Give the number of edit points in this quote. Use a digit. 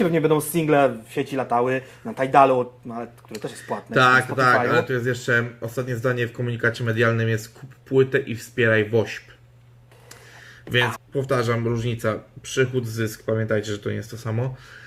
1